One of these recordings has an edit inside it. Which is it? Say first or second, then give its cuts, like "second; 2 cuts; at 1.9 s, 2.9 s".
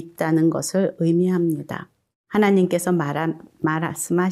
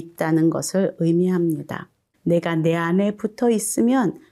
second; 1 cut; at 2.1 s